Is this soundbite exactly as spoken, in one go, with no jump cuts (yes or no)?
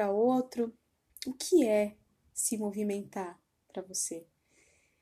yes